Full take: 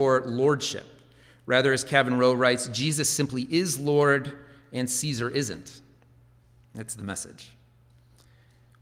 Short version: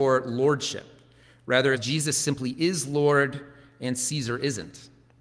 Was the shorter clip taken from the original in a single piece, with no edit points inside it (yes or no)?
no